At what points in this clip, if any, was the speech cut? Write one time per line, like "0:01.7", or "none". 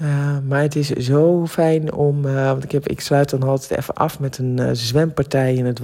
none